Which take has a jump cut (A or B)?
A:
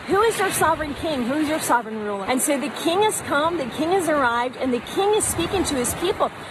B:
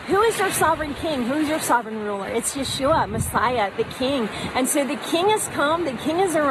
A